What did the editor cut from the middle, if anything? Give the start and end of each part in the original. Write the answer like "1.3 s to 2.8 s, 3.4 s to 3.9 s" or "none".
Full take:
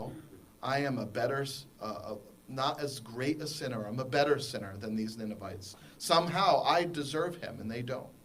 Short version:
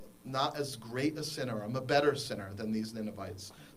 none